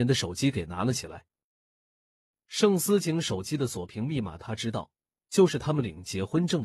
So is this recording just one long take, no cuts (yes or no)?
yes